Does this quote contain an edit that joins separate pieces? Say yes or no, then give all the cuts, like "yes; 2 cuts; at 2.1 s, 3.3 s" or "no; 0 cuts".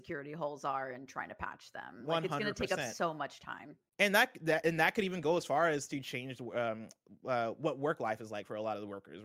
no; 0 cuts